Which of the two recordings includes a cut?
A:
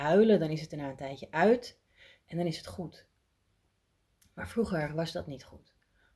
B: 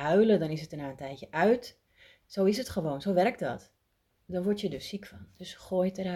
B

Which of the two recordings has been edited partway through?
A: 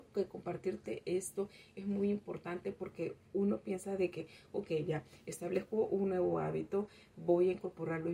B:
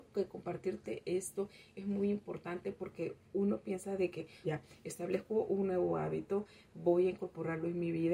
B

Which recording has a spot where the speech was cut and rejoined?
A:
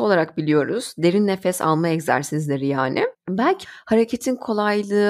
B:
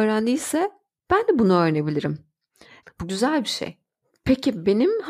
B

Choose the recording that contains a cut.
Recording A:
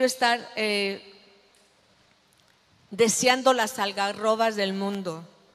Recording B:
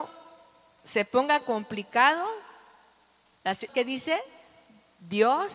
B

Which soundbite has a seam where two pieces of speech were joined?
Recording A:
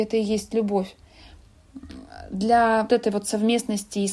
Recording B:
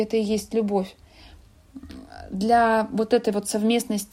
A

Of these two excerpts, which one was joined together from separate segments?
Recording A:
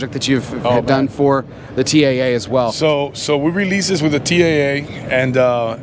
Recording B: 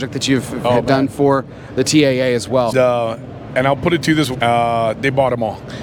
B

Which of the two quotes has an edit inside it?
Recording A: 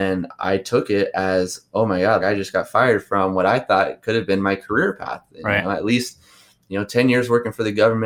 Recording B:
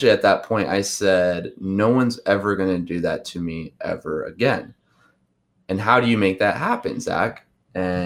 A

